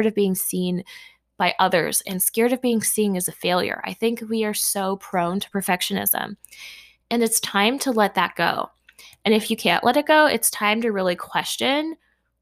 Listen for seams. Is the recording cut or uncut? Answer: uncut